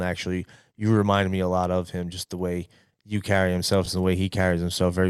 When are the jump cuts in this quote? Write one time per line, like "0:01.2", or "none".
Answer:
none